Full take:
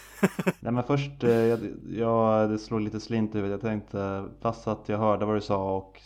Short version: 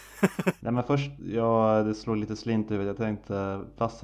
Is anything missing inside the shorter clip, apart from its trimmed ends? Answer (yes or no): yes